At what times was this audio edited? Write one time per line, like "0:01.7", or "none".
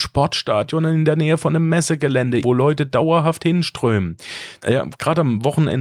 0:02.4
0:04.6